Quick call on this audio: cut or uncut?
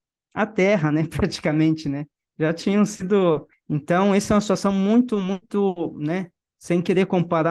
uncut